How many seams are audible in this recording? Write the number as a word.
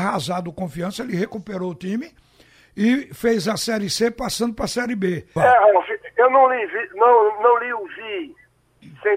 one